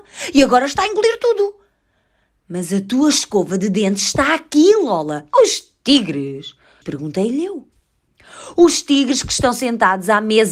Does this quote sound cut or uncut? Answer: cut